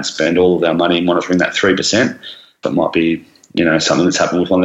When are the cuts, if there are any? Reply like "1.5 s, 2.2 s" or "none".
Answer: 2.6 s

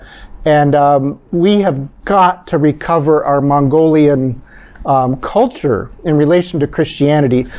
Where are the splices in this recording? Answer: none

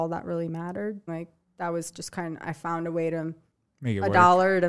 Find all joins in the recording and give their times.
1.1 s, 3.6 s

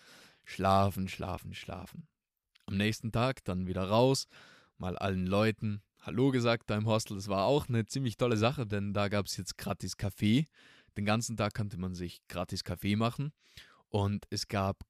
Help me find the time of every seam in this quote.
none

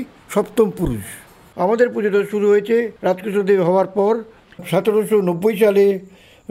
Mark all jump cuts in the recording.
3.0 s

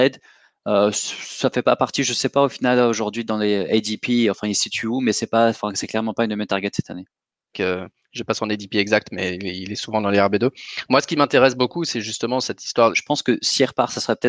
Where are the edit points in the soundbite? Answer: 7.5 s, 12.9 s

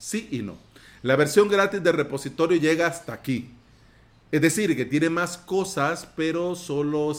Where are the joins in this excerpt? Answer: none

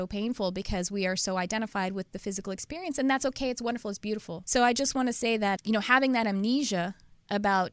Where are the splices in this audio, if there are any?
4.4 s, 5.6 s

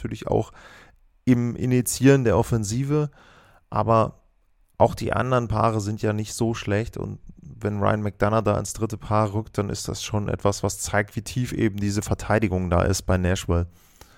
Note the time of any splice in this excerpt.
none

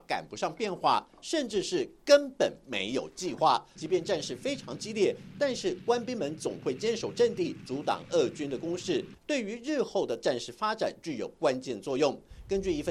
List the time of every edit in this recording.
3.8 s, 9.2 s

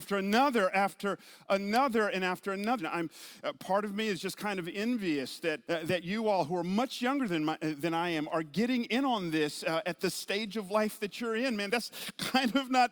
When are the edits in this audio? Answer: 2.8 s, 5.7 s

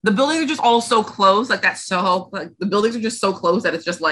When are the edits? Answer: none

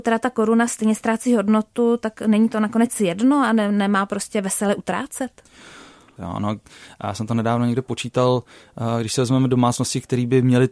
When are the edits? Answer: 6.2 s

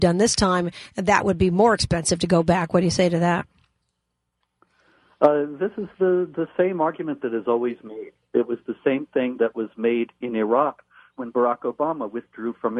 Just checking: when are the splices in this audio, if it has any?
none

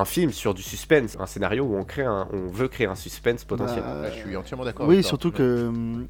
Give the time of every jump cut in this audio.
1.1 s

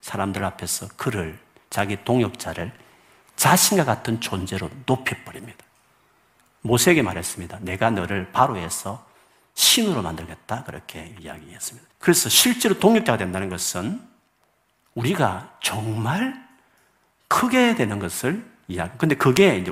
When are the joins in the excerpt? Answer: 11.9 s

